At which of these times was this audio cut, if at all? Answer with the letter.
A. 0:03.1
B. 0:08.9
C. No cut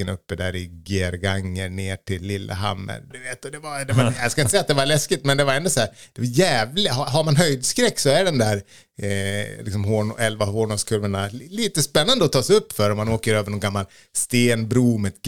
A